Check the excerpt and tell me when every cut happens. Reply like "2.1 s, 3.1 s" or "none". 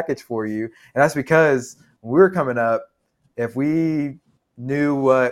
none